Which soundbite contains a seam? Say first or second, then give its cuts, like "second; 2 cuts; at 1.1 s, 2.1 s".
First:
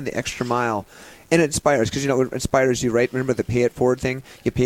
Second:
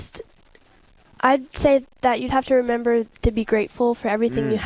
second; 2 cuts; at 1.0 s, 2.3 s